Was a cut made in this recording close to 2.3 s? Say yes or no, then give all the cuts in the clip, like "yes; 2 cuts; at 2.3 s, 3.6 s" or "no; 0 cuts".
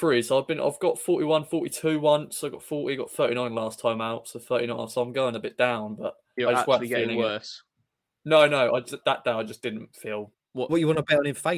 no; 2 cuts; at 9.0 s, 10.3 s